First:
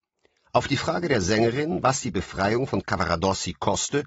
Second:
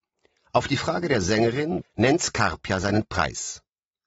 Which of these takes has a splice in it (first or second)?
second